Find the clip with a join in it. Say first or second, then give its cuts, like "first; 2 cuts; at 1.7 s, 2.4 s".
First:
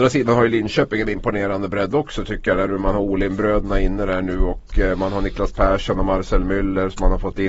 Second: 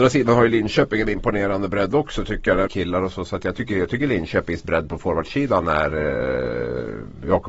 second; 1 cut; at 2.7 s